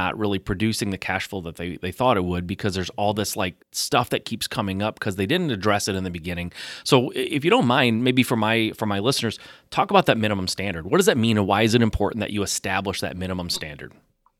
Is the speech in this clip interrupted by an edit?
yes; 1 cut; at 3.6 s

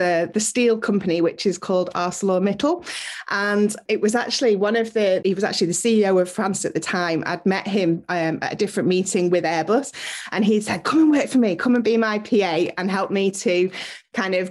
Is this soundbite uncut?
no; 1 cut; at 5.2 s

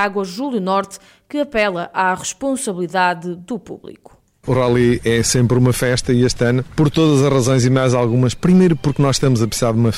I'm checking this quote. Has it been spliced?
no; 0 cuts

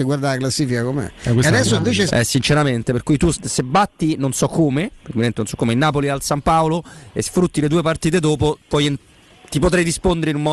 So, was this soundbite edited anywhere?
yes; 2 cuts; at 2.1 s, 3.3 s

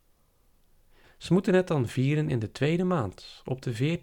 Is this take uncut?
no; 1 cut; at 1.0 s

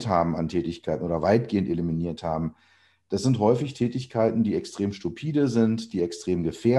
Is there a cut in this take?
no; 0 cuts

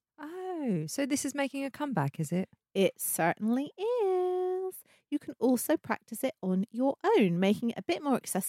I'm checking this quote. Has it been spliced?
no; 0 cuts

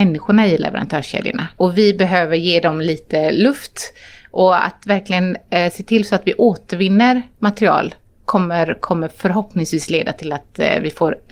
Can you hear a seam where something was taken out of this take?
yes; 1 cut; at 1.6 s

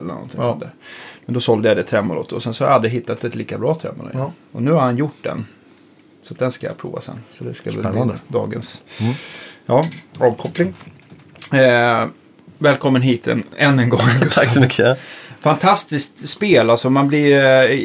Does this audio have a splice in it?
no; 0 cuts

